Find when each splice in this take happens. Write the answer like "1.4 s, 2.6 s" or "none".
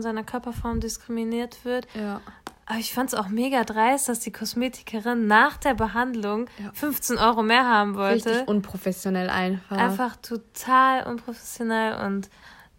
none